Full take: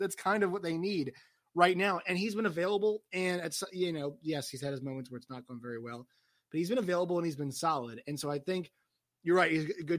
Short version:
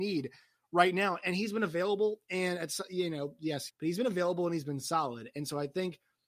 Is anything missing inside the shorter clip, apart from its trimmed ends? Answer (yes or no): yes